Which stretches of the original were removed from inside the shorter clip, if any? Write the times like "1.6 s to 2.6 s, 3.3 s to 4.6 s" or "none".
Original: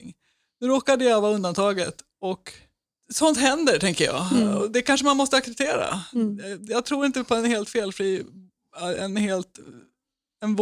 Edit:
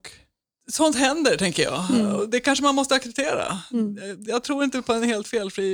none